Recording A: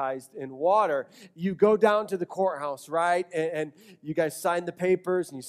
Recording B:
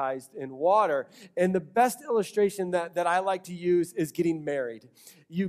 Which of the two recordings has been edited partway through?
A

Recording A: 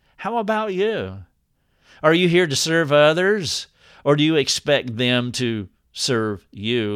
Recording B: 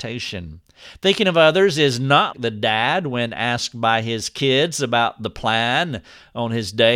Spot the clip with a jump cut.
B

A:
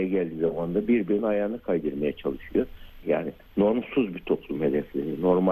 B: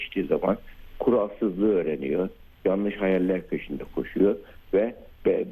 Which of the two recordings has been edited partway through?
A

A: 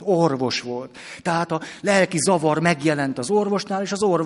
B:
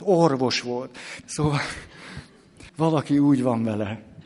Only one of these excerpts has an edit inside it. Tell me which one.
B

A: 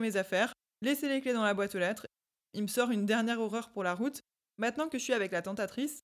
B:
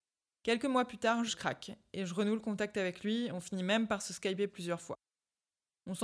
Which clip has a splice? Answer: B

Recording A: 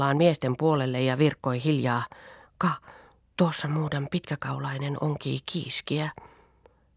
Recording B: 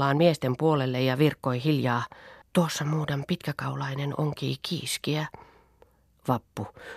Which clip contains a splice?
B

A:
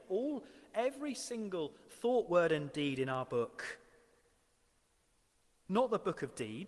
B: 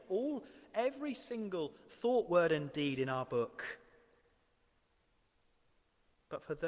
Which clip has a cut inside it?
A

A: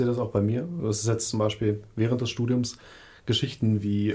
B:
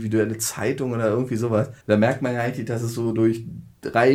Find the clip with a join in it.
B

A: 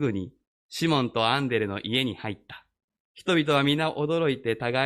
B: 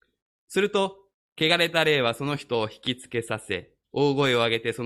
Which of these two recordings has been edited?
A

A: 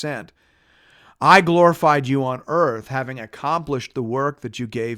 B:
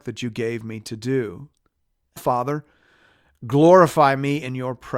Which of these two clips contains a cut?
B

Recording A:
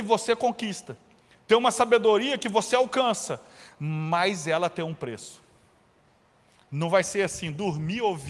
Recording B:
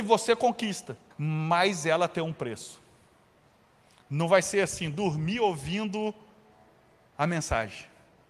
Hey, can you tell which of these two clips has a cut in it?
B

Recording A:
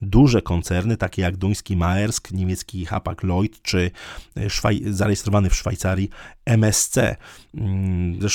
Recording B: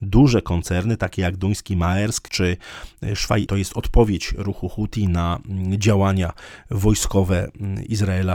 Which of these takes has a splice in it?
B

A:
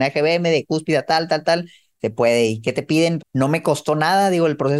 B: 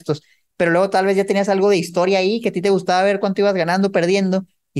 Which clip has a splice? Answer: A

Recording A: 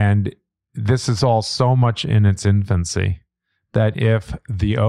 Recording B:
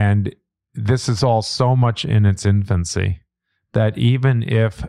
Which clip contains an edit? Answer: A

